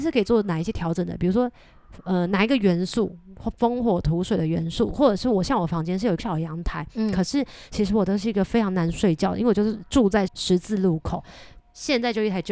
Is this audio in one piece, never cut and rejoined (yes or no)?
no